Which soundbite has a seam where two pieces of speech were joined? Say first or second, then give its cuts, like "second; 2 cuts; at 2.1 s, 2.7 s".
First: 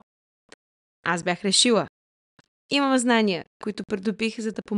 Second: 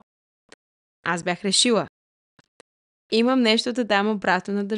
first; 1 cut; at 2.6 s